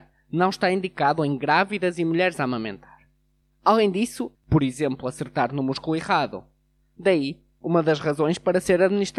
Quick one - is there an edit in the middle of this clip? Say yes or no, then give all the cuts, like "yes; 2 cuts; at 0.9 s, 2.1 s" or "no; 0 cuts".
yes; 1 cut; at 4.3 s